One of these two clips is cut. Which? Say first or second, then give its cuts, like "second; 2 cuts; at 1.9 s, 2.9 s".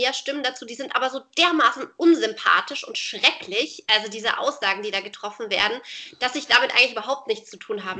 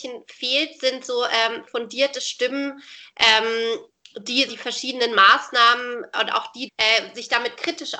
second; 3 cuts; at 1.7 s, 4.5 s, 6.7 s